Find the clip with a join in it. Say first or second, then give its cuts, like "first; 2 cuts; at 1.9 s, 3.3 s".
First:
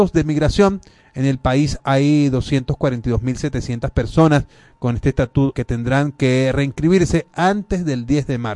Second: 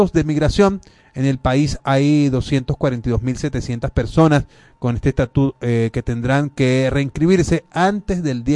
first; 1 cut; at 5.5 s